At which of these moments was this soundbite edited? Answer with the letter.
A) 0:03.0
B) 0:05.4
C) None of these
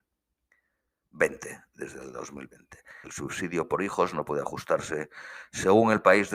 A